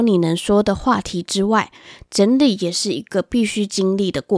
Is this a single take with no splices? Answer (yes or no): yes